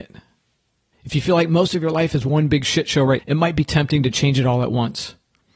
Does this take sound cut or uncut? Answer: cut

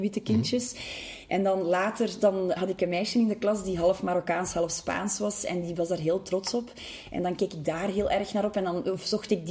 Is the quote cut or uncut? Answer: cut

